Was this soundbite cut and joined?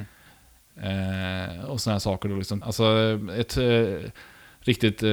yes; 1 cut; at 2.6 s

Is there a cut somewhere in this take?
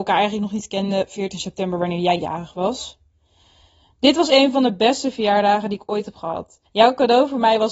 yes; 1 cut; at 6.7 s

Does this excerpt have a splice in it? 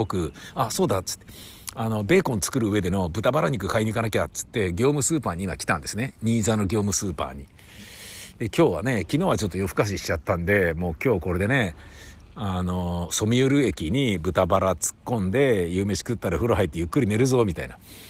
no; 0 cuts

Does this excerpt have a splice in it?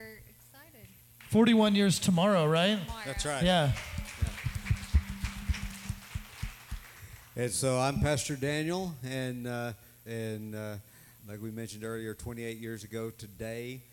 yes; 2 cuts; at 10.1 s, 11.2 s

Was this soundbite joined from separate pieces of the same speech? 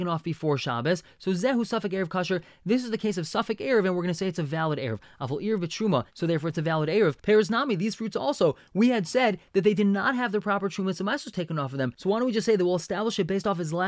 yes; 1 cut; at 6.1 s

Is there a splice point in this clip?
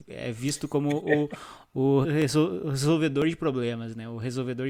yes; 1 cut; at 2.0 s

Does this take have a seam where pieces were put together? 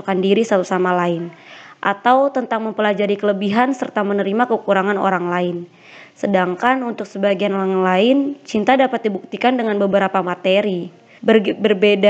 yes; 1 cut; at 11.2 s

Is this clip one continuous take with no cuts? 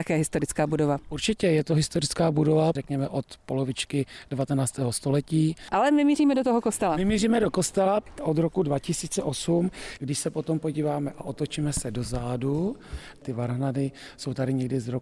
no; 1 cut; at 10.0 s

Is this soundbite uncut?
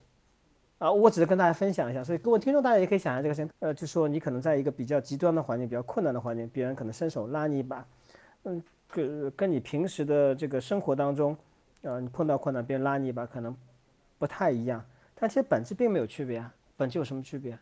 no; 1 cut; at 3.5 s

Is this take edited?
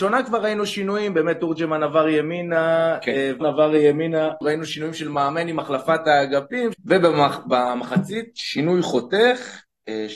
yes; 2 cuts; at 3.4 s, 6.7 s

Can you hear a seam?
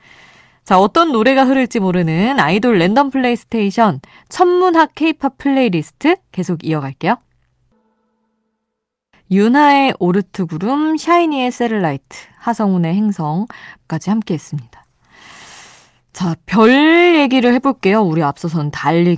no; 0 cuts

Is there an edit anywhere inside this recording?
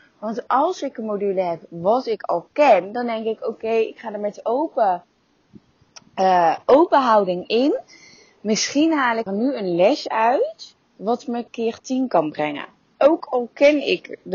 yes; 2 cuts; at 9.3 s, 10.8 s

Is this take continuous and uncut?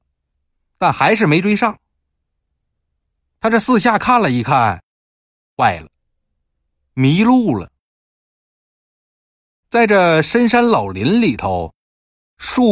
yes; 0 cuts

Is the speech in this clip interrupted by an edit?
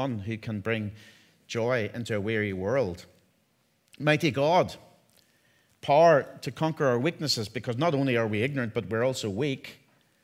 no; 0 cuts

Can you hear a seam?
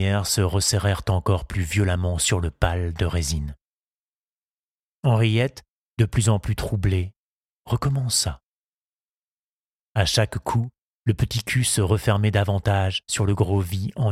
no; 0 cuts

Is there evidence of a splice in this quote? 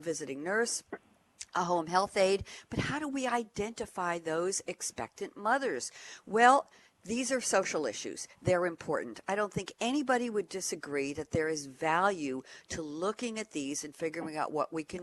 no; 0 cuts

